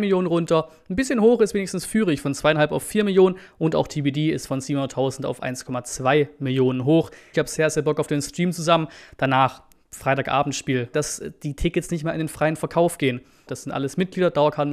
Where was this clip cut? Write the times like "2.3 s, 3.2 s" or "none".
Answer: 7.3 s, 10.9 s, 13.5 s

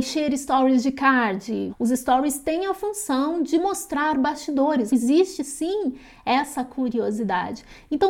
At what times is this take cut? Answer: 1.7 s, 4.9 s

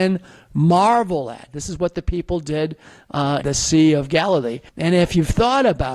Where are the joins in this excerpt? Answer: 3.4 s, 4.7 s

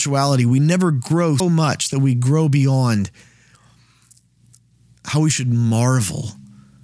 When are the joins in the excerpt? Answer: 1.4 s

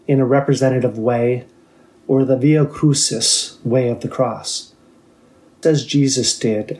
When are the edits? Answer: 2.0 s, 5.6 s

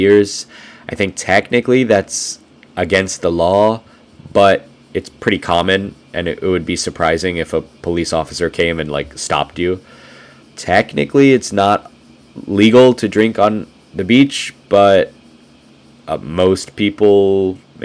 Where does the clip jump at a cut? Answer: 10.4 s

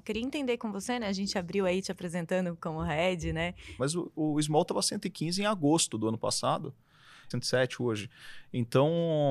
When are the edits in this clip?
3.8 s, 7.3 s

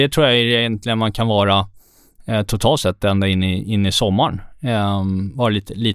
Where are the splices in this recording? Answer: none

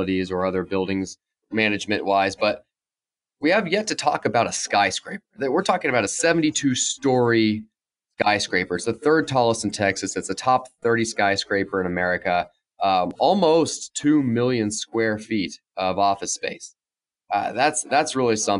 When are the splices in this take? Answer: 1.4 s

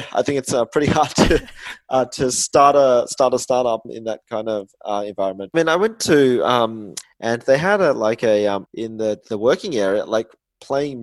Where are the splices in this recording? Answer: 5.5 s, 7.0 s, 8.6 s

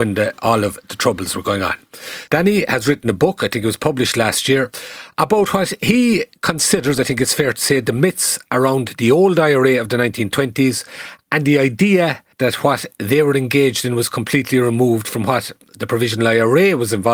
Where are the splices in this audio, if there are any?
2.3 s, 12.3 s

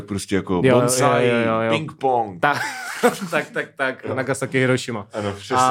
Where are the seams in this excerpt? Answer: none

